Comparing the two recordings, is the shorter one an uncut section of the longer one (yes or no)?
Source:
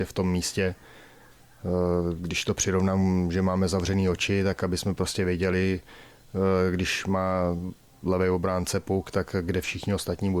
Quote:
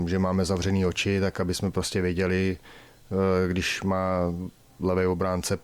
yes